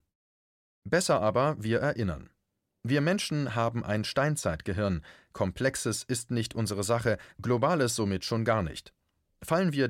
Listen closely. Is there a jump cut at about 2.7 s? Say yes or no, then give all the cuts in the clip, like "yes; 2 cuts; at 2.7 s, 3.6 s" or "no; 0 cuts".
no; 0 cuts